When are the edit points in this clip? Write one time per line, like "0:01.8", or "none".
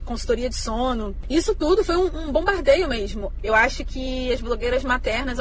0:03.4